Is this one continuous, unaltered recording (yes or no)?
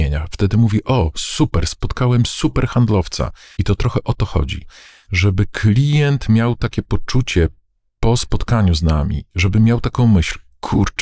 no